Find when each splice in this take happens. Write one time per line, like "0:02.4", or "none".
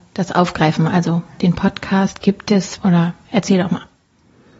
0:02.8